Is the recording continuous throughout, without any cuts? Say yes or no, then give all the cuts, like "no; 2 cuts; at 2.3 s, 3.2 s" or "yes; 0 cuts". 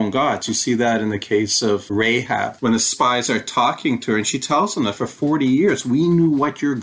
no; 1 cut; at 2.6 s